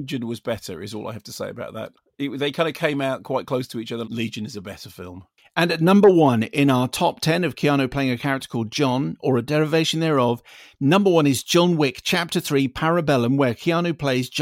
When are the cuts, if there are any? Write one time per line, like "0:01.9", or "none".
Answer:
0:04.0